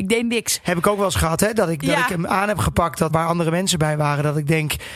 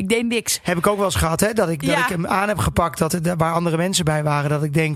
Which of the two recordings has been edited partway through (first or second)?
first